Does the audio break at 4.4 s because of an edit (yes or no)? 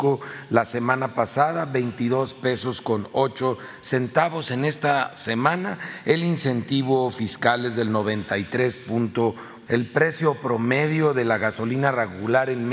no